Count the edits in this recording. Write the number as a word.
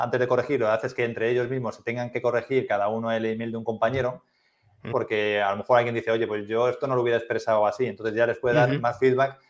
one